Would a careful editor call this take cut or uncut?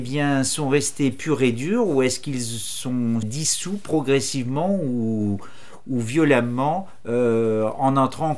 cut